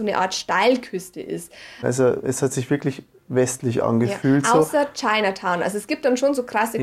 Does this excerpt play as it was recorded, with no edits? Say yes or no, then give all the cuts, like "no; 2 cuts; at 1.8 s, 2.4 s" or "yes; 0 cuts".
no; 1 cut; at 1.8 s